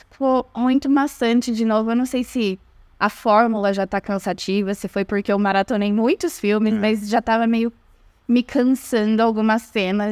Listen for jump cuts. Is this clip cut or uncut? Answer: uncut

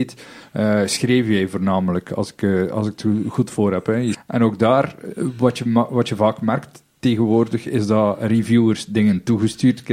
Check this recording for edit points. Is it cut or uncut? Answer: cut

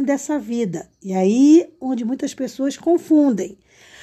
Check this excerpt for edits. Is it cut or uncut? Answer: uncut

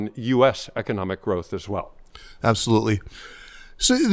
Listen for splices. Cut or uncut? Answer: uncut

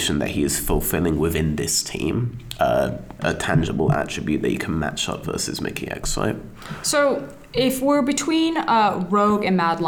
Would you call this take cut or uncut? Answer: cut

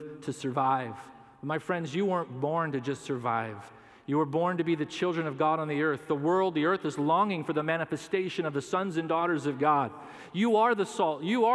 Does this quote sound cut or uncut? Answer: uncut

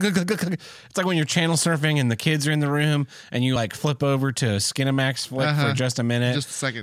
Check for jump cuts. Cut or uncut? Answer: uncut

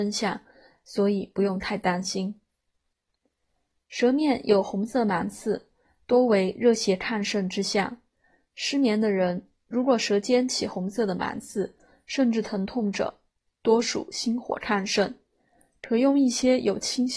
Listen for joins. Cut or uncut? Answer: uncut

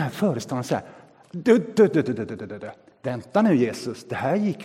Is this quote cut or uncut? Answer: uncut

